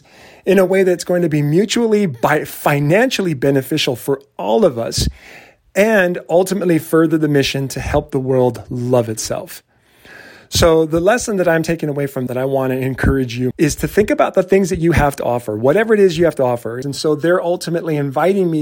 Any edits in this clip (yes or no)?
yes